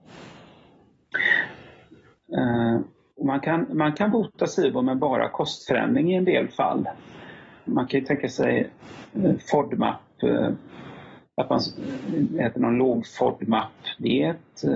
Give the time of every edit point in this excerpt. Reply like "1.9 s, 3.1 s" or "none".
7.7 s